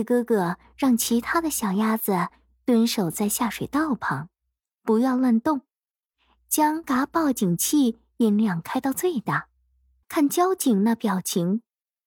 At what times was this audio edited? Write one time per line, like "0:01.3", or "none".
0:06.8
0:10.0